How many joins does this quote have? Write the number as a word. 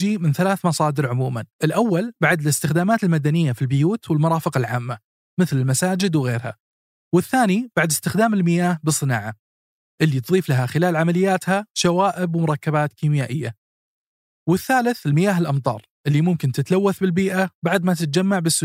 one